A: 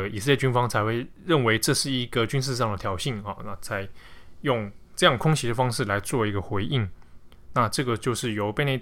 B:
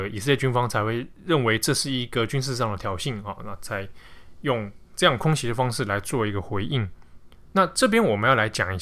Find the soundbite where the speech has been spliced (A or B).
A